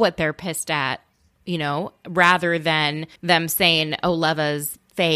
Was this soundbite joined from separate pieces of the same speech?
yes; 1 cut; at 3.2 s

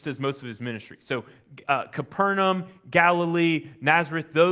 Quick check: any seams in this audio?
no; 0 cuts

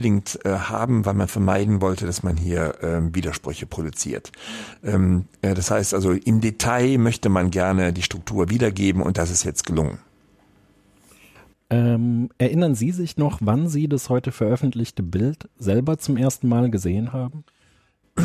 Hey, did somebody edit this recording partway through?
no; 0 cuts

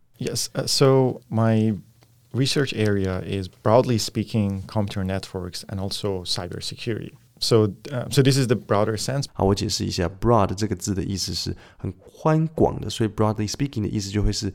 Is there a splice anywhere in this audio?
yes; 1 cut; at 9.3 s

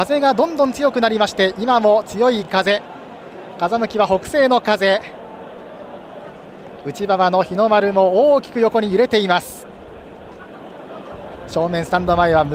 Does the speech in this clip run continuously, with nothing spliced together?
yes; 0 cuts

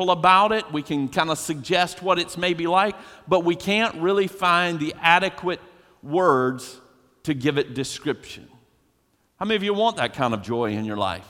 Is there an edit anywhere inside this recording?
no; 0 cuts

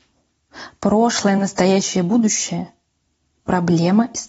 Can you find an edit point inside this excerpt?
no; 0 cuts

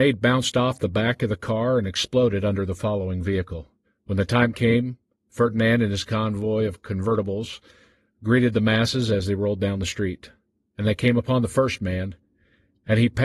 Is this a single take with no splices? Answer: no; 1 cut; at 3.8 s

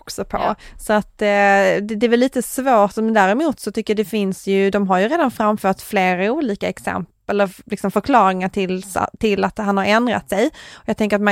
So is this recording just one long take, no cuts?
yes; 0 cuts

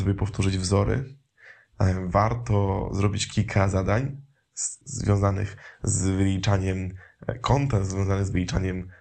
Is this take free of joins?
no; 1 cut; at 4.8 s

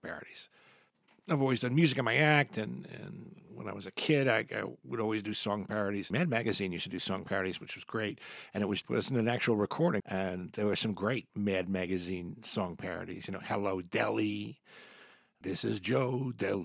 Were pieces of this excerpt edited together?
yes; 3 cuts; at 8.8 s, 10.0 s, 15.4 s

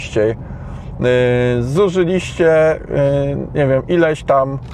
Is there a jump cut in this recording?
no; 0 cuts

